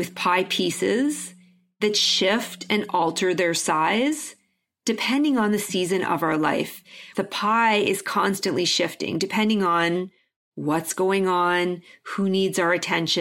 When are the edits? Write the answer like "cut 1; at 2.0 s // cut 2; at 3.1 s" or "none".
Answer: cut 1; at 7.1 s